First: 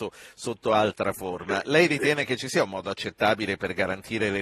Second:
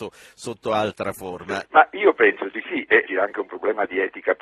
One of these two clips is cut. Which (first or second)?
second